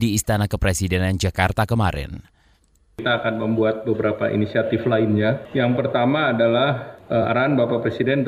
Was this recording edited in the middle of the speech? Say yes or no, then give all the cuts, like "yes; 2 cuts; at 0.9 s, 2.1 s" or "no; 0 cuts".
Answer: no; 0 cuts